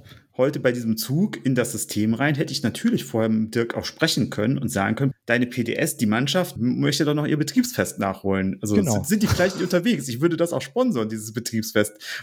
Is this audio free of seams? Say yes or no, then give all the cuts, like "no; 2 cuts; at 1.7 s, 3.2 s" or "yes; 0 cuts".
no; 2 cuts; at 5.1 s, 6.6 s